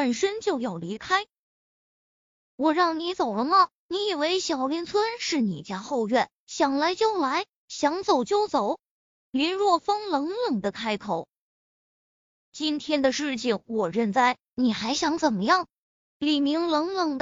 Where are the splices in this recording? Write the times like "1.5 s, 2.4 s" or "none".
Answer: none